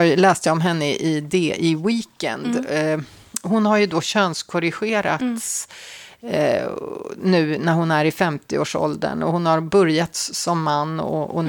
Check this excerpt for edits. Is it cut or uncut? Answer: uncut